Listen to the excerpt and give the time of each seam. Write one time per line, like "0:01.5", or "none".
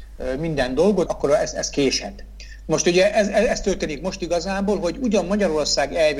0:01.1